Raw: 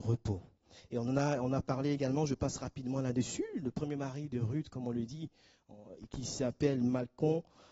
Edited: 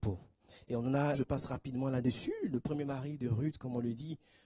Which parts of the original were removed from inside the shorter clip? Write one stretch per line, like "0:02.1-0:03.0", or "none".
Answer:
0:01.4-0:02.3